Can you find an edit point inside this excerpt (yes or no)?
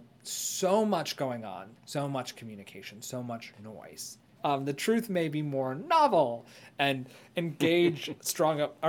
yes